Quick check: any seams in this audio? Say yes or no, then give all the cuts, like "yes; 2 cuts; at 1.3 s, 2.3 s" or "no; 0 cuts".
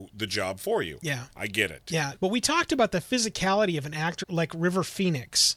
yes; 2 cuts; at 2.2 s, 4.2 s